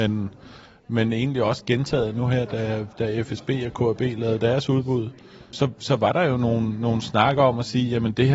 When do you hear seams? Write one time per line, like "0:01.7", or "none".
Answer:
0:05.5